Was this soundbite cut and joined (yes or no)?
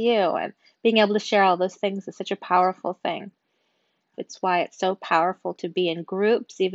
yes